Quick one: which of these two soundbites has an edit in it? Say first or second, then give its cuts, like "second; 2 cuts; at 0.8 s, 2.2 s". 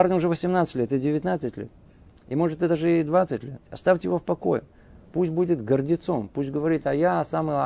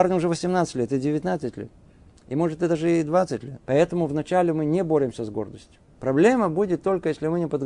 second; 2 cuts; at 3.6 s, 6.0 s